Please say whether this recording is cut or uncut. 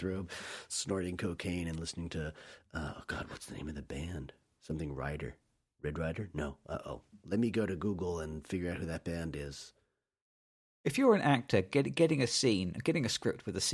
uncut